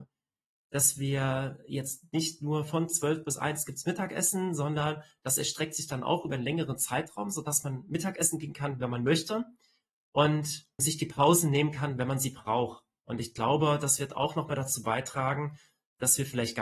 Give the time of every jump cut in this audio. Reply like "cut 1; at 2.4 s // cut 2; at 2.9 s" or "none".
cut 1; at 10.8 s

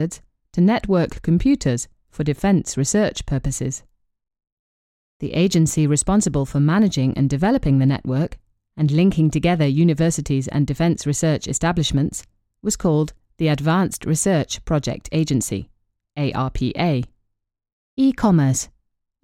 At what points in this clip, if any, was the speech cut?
cut 1; at 17.7 s

